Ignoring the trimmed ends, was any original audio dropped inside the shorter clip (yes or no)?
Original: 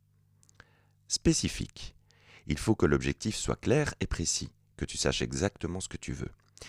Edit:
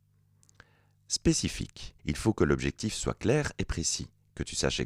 yes